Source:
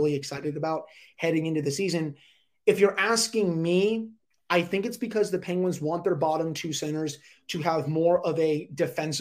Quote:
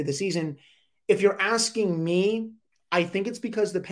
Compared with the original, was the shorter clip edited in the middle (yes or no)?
no